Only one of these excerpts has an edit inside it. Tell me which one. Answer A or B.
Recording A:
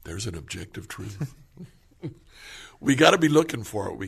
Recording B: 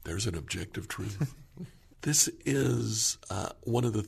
B